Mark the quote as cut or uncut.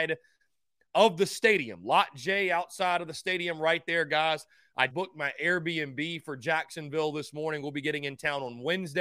cut